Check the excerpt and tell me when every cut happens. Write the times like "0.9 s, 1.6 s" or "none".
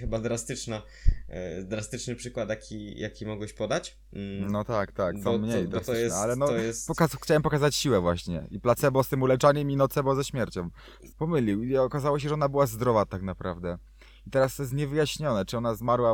11.1 s